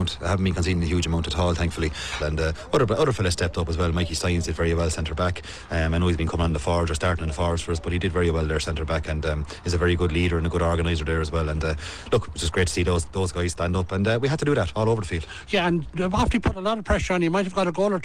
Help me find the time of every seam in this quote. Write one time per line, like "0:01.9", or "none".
0:02.2